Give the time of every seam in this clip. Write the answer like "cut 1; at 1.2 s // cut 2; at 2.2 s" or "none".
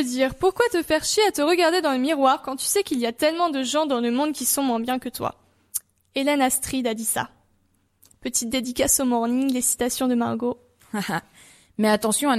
none

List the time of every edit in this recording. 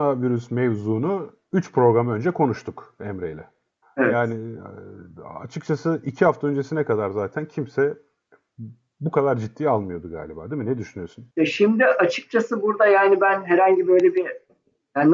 cut 1; at 3.8 s // cut 2; at 11.3 s

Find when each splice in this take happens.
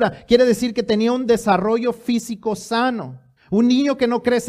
cut 1; at 3.4 s

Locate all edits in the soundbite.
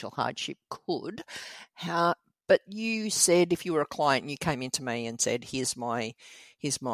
none

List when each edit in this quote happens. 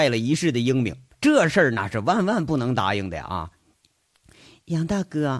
none

